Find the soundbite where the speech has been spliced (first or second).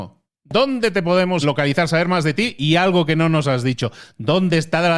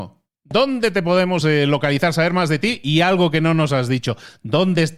first